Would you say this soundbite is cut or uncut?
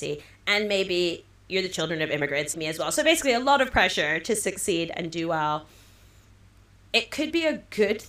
cut